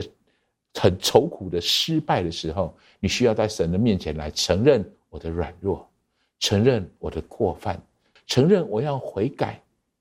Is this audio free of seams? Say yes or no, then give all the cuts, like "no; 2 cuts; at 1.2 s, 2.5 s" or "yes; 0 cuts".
no; 1 cut; at 8.2 s